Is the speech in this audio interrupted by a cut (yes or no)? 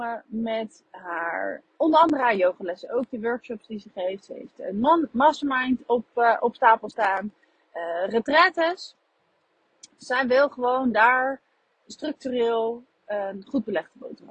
no